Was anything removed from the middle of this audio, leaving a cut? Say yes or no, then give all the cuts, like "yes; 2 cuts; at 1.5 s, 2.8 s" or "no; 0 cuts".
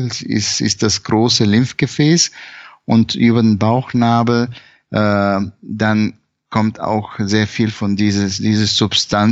no; 0 cuts